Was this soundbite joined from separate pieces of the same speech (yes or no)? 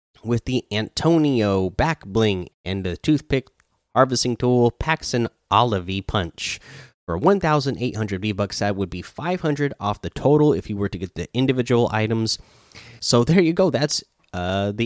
yes